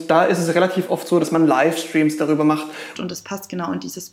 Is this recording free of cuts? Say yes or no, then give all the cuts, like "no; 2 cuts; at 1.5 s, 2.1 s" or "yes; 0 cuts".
no; 2 cuts; at 1.2 s, 2.9 s